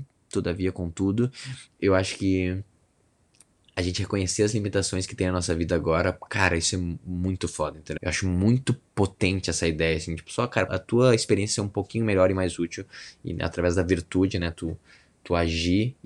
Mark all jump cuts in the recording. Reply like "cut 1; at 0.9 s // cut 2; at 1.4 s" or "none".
cut 1; at 8.0 s // cut 2; at 10.7 s